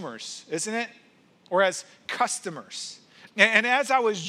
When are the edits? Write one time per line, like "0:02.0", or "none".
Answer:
0:03.3